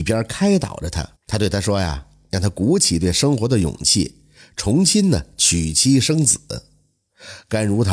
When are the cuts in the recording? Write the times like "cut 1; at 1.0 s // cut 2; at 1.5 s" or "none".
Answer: cut 1; at 1.2 s